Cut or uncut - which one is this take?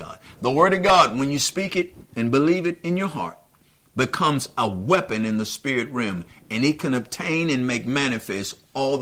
uncut